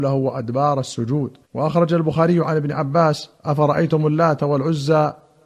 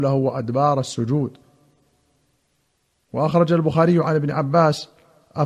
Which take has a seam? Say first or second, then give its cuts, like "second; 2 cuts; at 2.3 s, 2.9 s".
first; 2 cuts; at 1.4 s, 3.4 s